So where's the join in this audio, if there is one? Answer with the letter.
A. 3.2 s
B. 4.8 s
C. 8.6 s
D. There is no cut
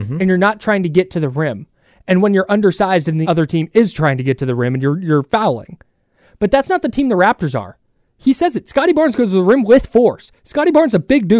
A